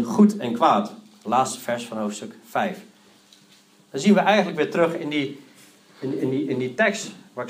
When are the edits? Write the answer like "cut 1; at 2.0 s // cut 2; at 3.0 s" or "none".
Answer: none